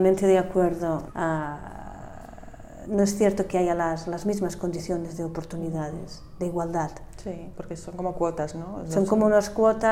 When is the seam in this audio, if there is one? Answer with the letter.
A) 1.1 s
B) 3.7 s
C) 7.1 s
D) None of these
A